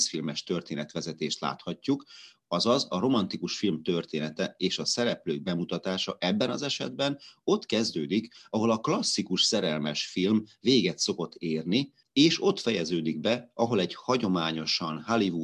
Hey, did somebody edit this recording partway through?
no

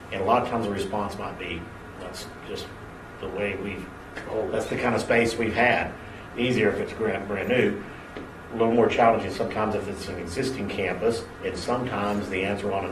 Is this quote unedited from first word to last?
no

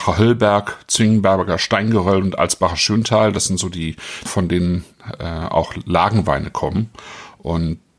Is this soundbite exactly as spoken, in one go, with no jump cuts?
no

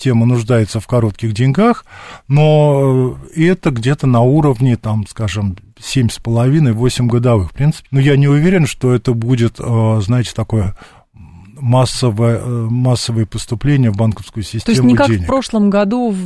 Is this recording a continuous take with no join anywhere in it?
no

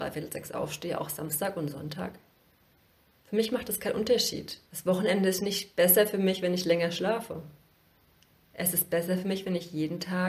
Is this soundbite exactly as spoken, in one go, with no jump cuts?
no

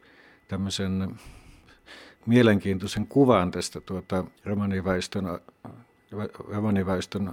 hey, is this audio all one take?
no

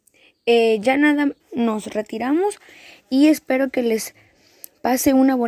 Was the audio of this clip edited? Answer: yes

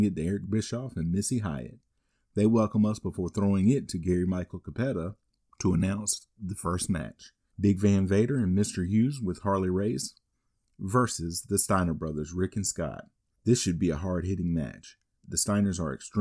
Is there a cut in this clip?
no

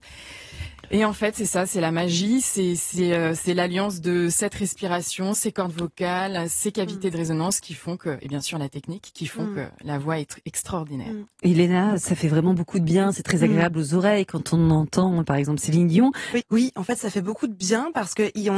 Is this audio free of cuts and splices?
no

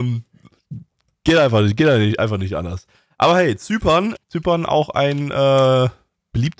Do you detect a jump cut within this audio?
yes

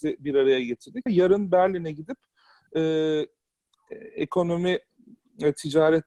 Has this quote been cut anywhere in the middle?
yes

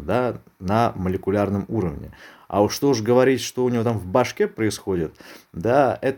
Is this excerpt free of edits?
yes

